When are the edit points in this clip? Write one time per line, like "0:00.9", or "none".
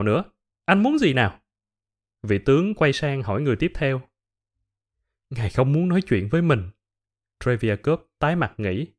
none